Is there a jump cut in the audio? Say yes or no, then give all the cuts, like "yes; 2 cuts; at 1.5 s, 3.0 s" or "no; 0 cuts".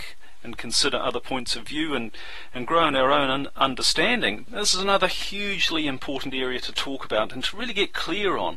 yes; 1 cut; at 4.5 s